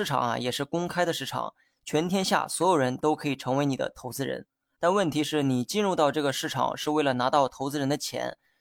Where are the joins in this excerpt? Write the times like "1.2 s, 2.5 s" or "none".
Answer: 4.8 s